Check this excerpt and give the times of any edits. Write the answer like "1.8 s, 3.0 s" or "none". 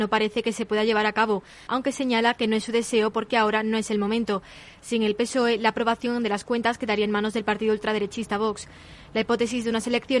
1.7 s